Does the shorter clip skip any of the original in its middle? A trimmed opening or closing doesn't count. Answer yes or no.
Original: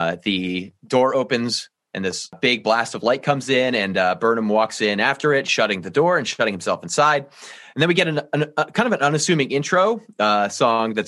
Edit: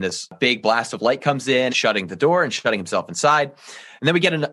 yes